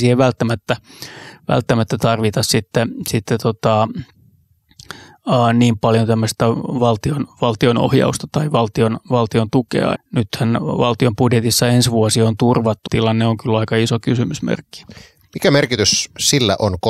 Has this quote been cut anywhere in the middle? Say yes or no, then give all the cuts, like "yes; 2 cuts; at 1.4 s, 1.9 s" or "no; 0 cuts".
yes; 2 cuts; at 9.9 s, 12.9 s